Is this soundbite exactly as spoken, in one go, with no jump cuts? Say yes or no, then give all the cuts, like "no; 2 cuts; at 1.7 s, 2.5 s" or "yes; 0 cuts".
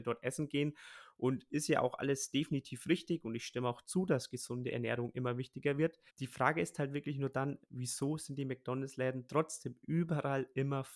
no; 1 cut; at 6.1 s